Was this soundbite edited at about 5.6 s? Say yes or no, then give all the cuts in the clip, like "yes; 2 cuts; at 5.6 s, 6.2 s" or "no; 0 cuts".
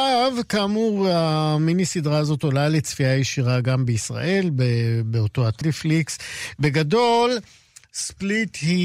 yes; 1 cut; at 5.6 s